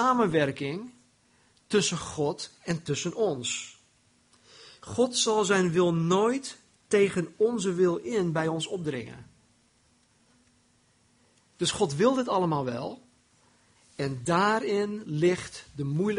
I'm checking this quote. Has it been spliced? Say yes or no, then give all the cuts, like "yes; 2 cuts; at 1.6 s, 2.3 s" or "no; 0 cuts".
yes; 1 cut; at 13.7 s